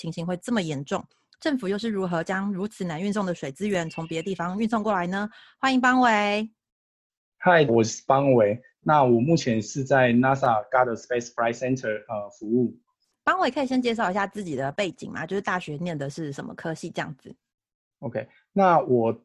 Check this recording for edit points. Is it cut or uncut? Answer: cut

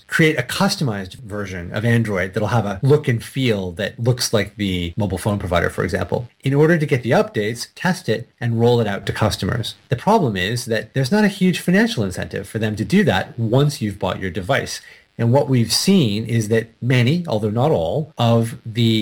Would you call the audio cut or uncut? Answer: cut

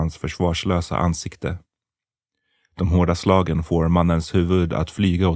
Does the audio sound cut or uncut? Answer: uncut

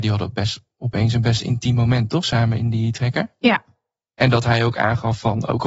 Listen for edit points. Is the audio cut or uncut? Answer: uncut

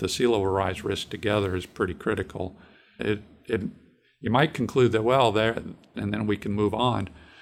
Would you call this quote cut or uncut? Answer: cut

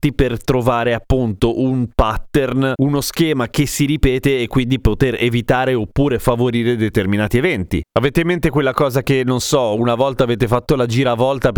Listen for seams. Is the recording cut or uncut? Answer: uncut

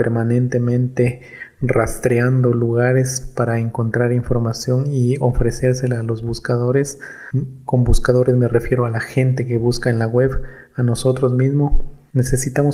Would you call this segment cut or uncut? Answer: uncut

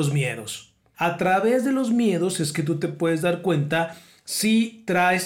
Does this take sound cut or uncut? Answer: cut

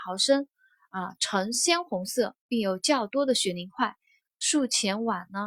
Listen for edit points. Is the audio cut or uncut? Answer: cut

